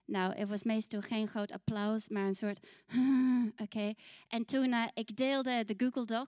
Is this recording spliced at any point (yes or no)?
no